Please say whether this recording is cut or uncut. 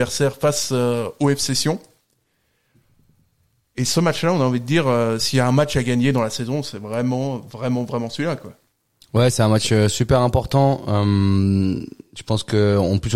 uncut